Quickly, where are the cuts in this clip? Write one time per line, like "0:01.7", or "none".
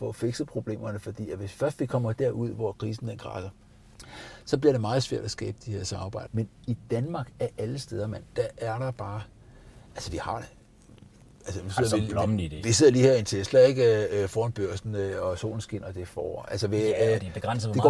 0:06.3